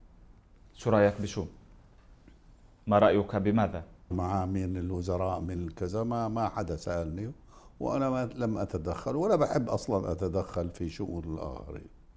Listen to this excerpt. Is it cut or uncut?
cut